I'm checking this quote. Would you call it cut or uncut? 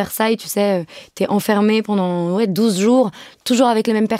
uncut